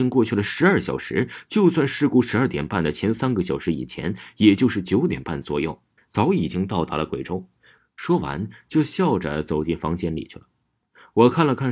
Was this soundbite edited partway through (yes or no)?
yes